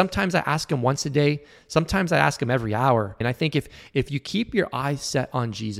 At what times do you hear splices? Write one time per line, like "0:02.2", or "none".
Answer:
0:03.2